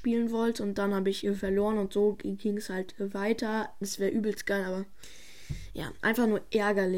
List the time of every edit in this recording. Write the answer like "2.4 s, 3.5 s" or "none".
3.8 s